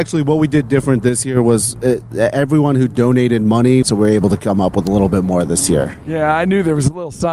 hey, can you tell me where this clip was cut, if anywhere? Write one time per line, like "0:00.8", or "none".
0:03.8